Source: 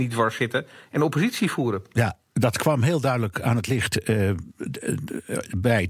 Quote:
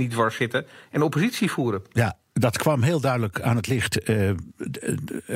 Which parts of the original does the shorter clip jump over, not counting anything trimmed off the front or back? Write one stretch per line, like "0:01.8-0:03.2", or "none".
none